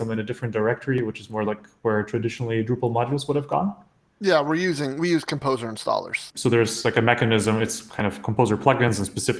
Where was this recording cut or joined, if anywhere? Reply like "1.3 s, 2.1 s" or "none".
6.3 s